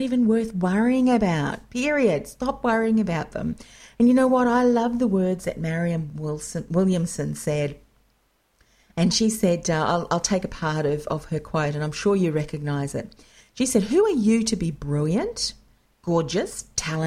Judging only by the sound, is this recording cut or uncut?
uncut